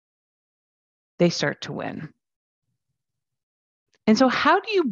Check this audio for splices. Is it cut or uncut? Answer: uncut